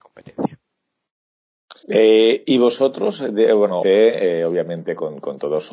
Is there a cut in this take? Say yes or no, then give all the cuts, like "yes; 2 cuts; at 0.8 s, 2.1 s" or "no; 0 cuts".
yes; 2 cuts; at 1.8 s, 3.8 s